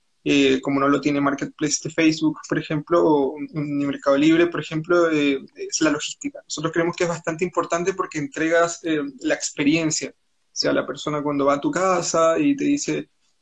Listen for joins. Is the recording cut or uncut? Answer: uncut